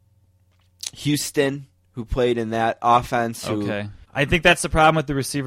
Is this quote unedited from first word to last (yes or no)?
no